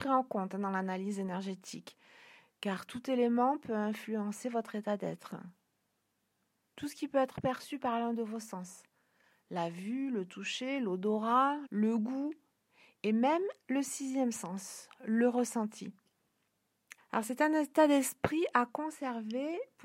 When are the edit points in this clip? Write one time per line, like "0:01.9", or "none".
0:11.7
0:17.0